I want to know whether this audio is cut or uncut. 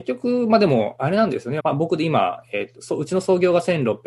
cut